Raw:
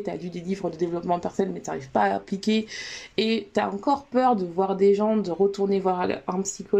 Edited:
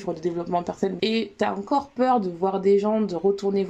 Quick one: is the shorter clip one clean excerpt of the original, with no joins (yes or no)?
no